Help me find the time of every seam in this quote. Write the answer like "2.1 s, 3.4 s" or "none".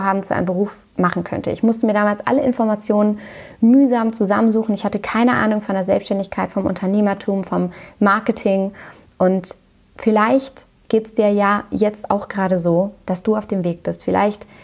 none